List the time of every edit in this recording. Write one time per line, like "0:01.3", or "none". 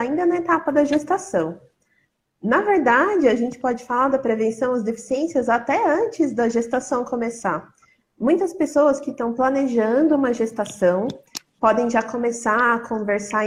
none